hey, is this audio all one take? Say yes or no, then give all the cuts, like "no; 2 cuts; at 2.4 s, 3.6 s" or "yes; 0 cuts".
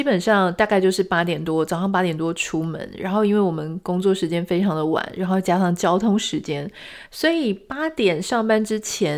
no; 1 cut; at 7.1 s